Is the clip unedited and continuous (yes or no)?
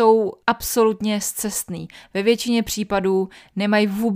yes